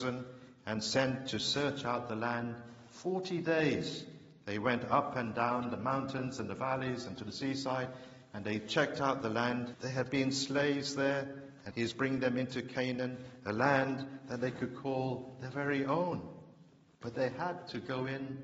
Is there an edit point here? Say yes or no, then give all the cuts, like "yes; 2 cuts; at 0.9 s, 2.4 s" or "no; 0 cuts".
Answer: yes; 2 cuts; at 9.7 s, 11.7 s